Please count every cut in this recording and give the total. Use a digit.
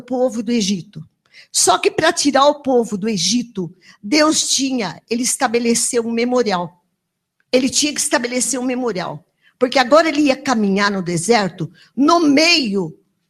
0